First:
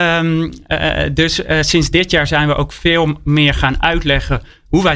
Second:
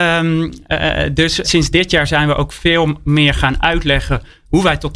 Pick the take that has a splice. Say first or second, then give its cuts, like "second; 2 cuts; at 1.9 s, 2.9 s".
second; 1 cut; at 1.4 s